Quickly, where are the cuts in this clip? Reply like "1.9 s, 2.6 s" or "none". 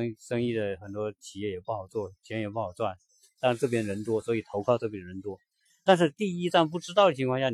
3.3 s